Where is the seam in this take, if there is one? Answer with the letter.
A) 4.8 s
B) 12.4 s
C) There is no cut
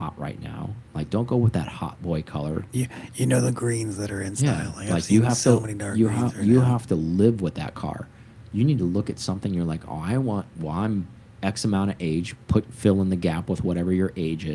C